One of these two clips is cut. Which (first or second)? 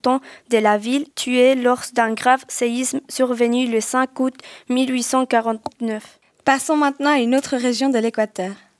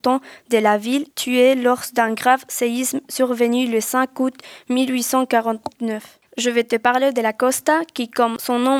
second